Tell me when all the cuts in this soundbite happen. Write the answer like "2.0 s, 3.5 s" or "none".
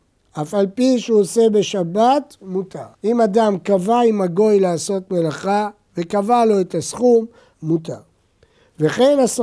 2.9 s, 7.5 s